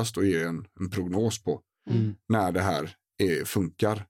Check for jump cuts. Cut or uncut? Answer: uncut